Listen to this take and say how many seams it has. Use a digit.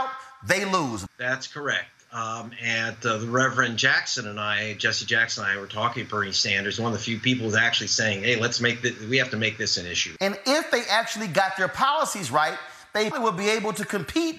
3